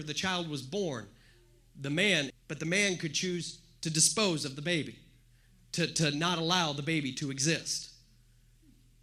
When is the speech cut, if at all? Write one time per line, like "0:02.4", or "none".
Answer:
0:02.3